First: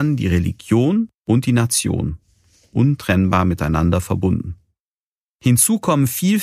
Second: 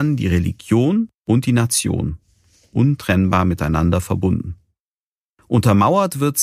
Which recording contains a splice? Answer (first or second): first